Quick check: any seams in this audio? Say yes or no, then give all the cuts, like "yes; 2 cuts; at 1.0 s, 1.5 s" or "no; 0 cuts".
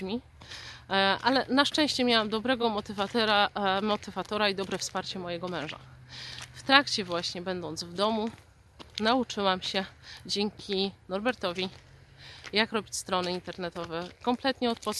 no; 0 cuts